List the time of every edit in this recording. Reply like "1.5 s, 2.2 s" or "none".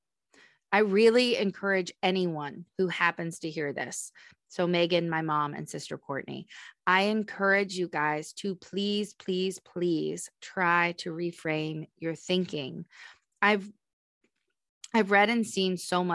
none